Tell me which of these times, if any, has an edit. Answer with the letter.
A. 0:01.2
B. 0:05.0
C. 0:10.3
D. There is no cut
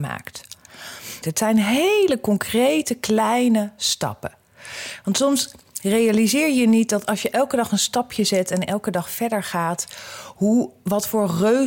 A